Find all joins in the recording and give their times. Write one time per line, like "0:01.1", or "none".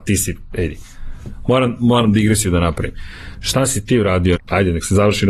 0:04.3